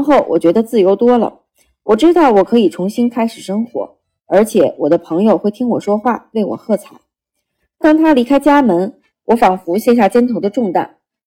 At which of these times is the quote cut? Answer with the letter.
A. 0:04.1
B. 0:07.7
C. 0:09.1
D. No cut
C